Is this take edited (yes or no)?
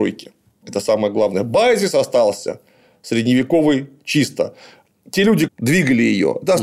yes